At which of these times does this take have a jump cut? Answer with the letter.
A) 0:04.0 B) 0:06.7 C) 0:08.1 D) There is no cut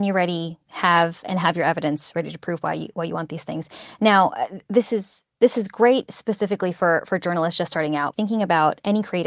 C